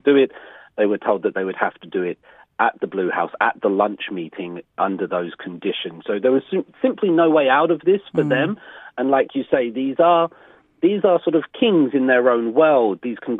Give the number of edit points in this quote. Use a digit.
0